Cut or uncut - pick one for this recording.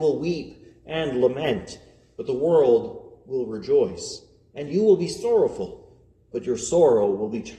uncut